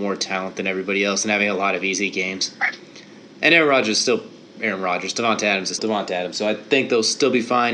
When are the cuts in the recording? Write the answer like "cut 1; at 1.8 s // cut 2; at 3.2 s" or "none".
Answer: cut 1; at 5.8 s